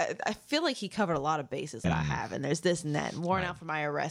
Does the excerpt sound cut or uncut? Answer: cut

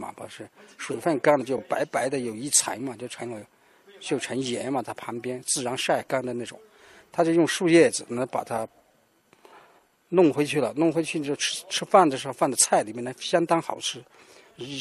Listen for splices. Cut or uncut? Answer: uncut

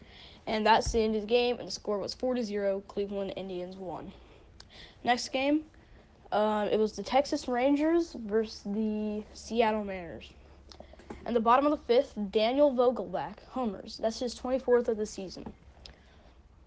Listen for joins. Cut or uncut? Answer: uncut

